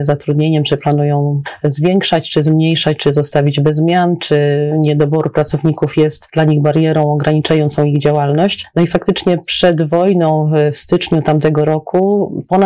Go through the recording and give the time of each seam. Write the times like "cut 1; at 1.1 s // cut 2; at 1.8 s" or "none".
none